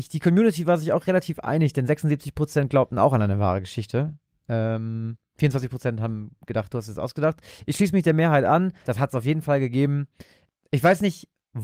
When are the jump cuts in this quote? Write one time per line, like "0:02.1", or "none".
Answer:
0:08.8